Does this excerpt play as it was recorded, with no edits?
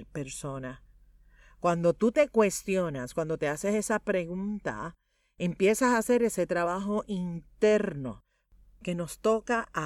yes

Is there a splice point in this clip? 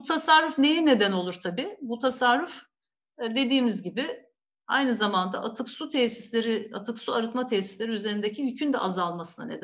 no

